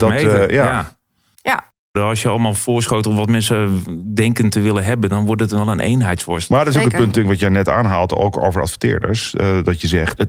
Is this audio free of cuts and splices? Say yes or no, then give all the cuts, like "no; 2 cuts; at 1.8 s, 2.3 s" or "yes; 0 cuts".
no; 1 cut; at 2.0 s